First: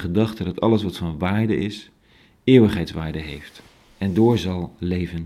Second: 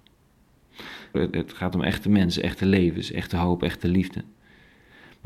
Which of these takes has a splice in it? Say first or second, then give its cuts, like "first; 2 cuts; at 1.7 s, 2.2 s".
second; 1 cut; at 1.1 s